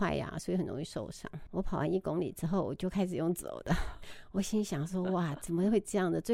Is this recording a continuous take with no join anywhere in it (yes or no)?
no